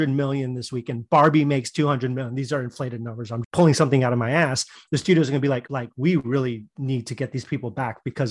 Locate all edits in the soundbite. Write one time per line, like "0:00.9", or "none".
0:03.4
0:05.7

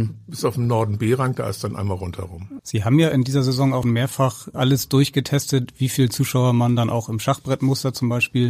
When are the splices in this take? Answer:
0:02.6
0:03.8

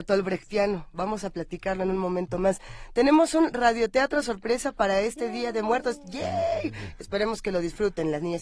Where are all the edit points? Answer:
none

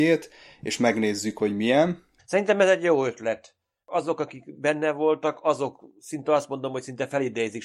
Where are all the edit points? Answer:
0:02.2

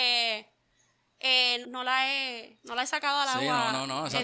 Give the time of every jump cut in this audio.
0:01.6

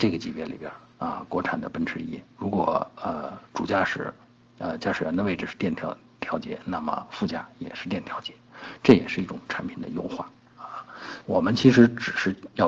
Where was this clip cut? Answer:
0:11.2

